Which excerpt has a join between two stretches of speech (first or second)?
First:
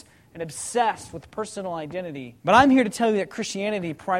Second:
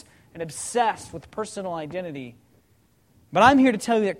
first